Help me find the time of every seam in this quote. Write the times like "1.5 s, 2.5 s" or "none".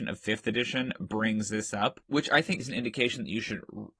2.6 s